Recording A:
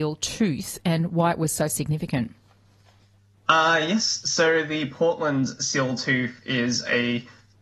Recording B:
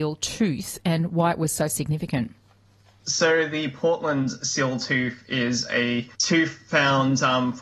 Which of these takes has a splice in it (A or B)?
B